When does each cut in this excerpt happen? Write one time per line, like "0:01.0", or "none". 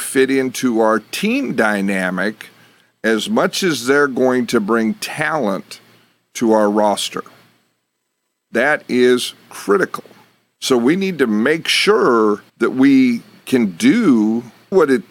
0:10.6
0:12.5